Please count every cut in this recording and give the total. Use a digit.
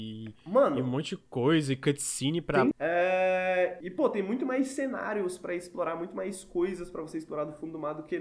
2